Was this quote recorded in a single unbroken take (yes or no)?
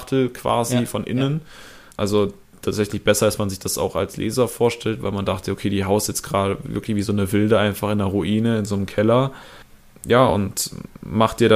yes